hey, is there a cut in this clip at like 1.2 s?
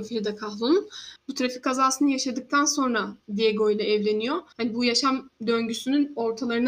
yes; 2 cuts; at 1.2 s, 4.5 s

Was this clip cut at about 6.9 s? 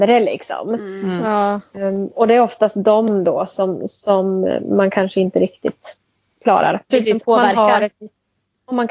yes; 1 cut; at 6.9 s

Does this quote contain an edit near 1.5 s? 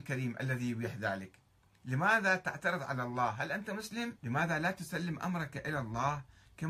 no; 1 cut; at 4.2 s

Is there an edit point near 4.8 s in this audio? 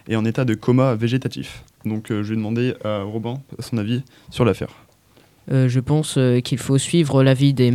no; 1 cut; at 1.8 s

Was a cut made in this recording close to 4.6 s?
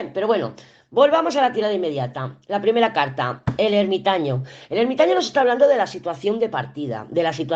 no; 0 cuts

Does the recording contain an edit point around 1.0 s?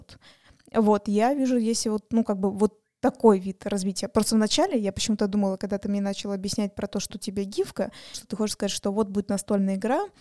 no; 2 cuts; at 7.1 s, 8.1 s

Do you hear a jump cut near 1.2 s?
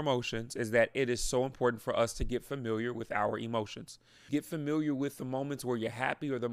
no; 1 cut; at 4.3 s

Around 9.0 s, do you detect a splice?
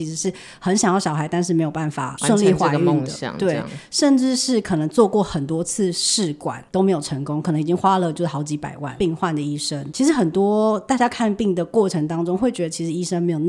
yes; 1 cut; at 9.0 s

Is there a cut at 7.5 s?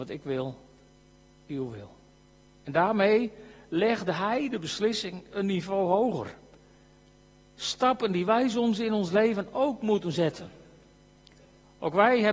no; 1 cut; at 2.5 s

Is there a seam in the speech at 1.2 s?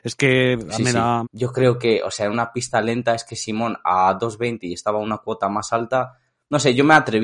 yes; 1 cut; at 1.2 s

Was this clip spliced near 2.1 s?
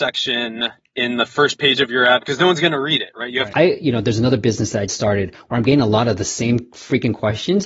no; 2 cuts; at 3.5 s, 4.9 s

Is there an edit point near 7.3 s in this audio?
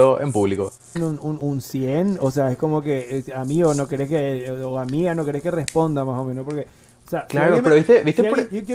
no; 1 cut; at 0.9 s

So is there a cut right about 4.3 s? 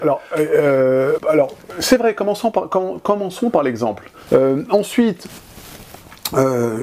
yes; 2 cuts; at 1.2 s, 4.3 s

